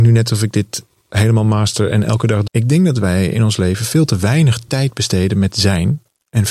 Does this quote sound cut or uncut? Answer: cut